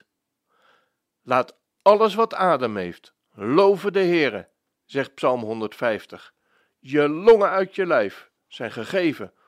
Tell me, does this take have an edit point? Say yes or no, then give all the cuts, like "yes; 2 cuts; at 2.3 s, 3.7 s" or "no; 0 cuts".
no; 0 cuts